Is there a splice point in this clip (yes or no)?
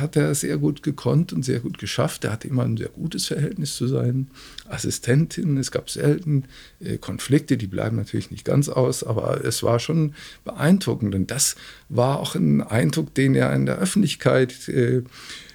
no